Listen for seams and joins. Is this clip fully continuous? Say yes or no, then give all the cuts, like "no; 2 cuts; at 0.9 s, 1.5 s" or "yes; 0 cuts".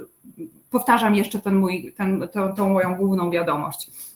yes; 0 cuts